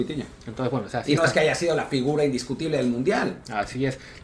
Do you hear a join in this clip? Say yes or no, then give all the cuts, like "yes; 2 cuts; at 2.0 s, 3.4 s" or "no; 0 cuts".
no; 0 cuts